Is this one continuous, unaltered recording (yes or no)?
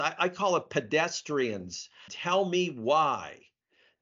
no